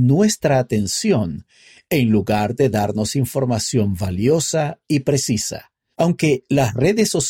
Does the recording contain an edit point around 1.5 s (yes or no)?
no